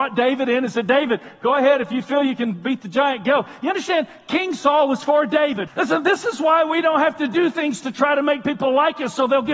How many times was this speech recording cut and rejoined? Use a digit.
1